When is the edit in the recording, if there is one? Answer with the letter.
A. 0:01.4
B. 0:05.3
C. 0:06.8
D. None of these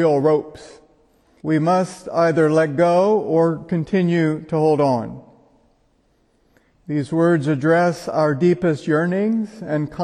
A